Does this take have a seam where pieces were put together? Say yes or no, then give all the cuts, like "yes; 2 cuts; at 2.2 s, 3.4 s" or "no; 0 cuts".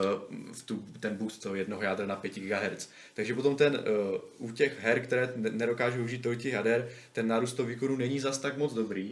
no; 0 cuts